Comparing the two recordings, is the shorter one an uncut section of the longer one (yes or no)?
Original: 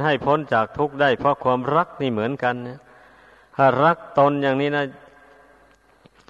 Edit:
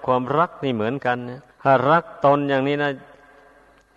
no